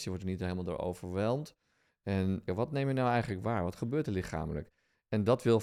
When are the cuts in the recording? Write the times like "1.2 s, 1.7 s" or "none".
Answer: 2.5 s